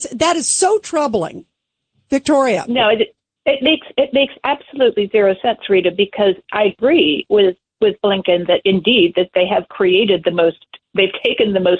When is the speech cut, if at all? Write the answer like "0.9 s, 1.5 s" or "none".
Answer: none